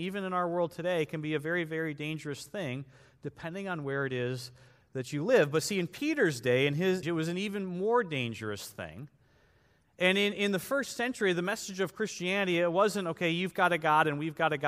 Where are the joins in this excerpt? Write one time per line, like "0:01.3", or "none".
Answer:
0:07.0